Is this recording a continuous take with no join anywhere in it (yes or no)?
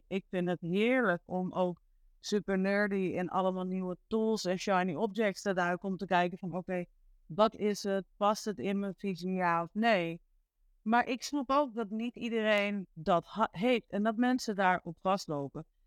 yes